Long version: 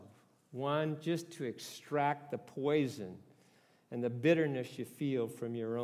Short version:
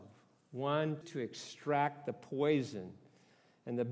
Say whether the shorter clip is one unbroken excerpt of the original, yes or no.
no